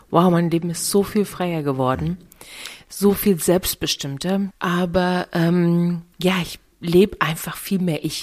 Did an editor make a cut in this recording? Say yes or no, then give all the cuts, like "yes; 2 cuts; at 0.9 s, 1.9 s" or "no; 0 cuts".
yes; 2 cuts; at 4.5 s, 6.1 s